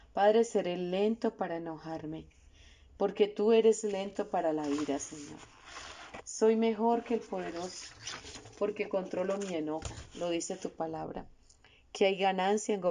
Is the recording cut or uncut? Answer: uncut